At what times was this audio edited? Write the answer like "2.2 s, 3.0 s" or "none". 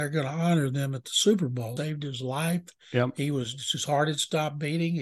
1.8 s